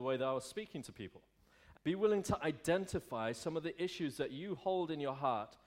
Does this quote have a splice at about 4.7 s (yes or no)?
no